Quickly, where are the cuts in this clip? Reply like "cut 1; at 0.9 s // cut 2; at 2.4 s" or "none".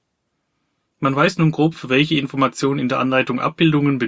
none